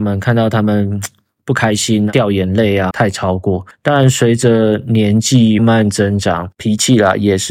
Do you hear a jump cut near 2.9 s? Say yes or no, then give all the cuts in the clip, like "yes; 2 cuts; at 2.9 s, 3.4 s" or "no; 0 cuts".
yes; 2 cuts; at 2.9 s, 5.6 s